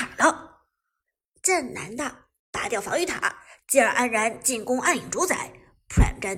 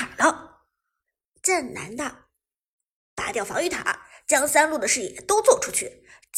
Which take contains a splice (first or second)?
first